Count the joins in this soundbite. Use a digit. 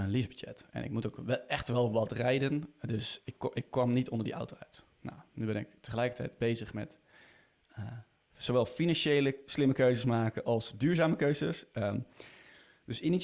0